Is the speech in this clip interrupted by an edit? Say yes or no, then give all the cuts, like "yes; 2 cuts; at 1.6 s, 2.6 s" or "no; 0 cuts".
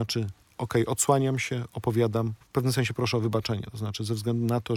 yes; 1 cut; at 2.4 s